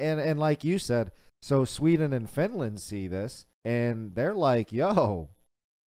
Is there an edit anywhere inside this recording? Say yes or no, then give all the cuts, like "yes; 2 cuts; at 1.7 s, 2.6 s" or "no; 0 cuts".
yes; 1 cut; at 3.5 s